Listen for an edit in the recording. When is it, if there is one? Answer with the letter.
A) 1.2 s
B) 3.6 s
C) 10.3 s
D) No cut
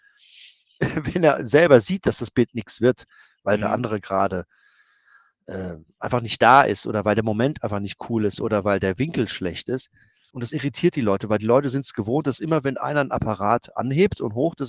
C